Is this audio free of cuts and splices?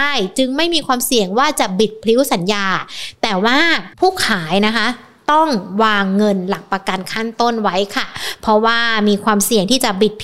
no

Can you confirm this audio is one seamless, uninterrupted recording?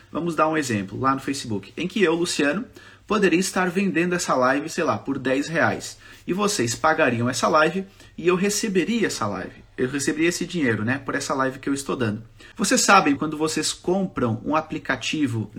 no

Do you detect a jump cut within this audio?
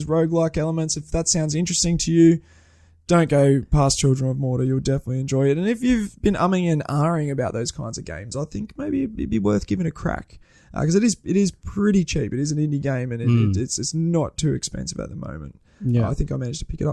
no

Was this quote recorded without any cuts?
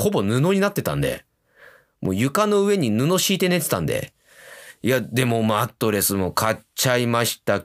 yes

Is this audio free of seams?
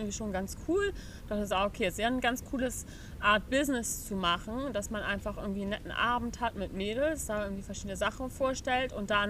yes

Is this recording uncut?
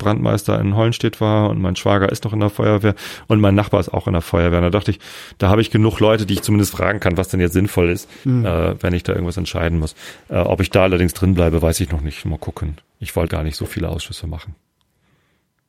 no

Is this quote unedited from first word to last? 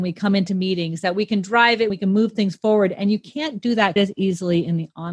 no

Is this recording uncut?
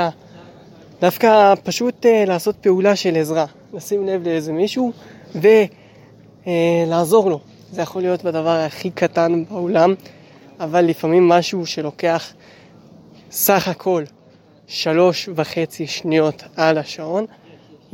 yes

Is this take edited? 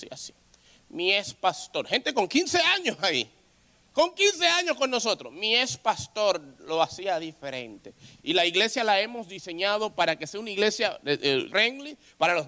yes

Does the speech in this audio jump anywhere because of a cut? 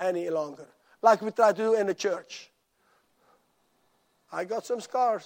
no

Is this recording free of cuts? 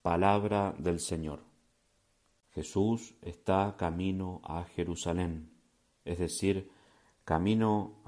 no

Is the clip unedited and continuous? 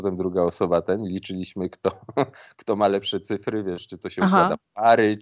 yes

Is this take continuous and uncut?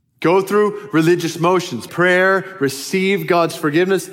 no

